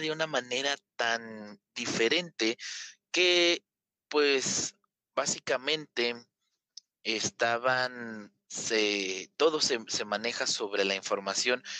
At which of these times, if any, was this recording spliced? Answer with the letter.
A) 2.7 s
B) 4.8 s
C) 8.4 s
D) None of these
D